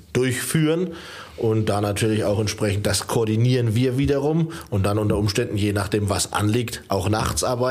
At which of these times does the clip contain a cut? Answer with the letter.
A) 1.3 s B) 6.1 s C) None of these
C